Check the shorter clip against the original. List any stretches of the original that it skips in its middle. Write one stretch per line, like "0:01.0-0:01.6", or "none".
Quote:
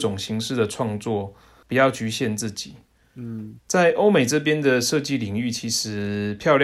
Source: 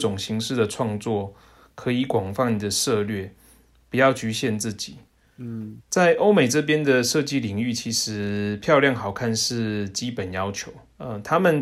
0:01.6-0:03.8